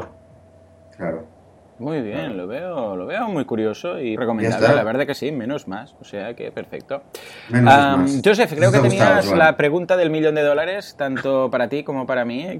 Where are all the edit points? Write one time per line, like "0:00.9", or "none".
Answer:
0:04.2